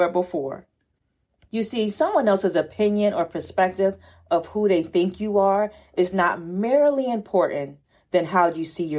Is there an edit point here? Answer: yes; 1 cut; at 1.4 s

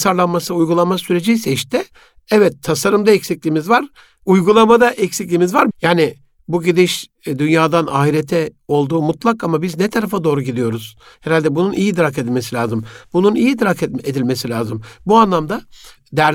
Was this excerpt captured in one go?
no; 3 cuts; at 5.7 s, 11.1 s, 13.0 s

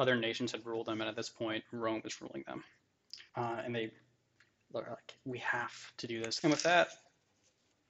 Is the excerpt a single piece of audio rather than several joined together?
no; 2 cuts; at 3.3 s, 6.4 s

